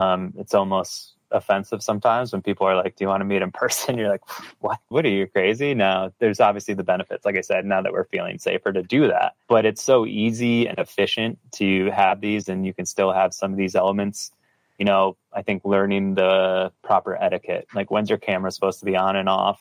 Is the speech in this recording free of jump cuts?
no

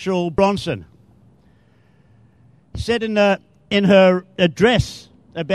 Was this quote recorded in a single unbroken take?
yes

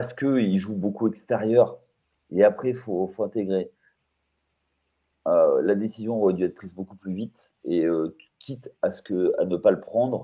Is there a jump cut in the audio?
yes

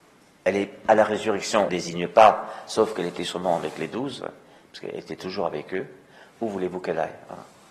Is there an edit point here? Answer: yes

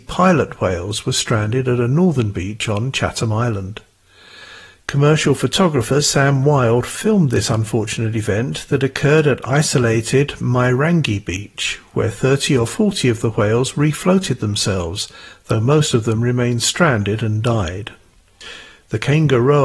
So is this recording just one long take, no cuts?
yes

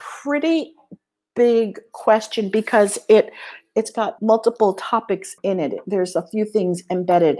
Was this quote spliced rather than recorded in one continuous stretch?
yes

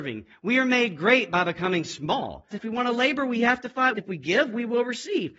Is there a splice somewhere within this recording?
yes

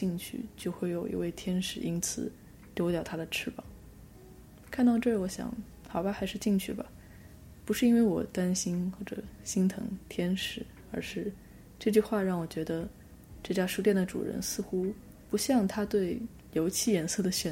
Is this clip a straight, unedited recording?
yes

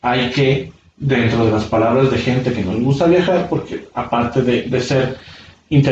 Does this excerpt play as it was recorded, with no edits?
yes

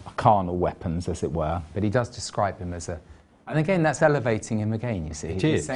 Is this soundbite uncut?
yes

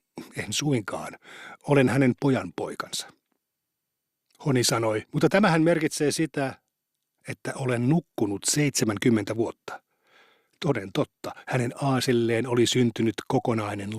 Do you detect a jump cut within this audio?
yes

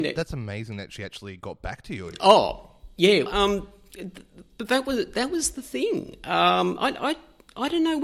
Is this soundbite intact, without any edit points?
no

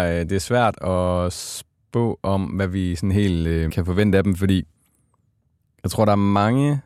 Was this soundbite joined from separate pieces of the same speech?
yes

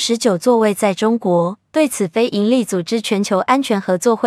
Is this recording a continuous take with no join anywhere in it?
no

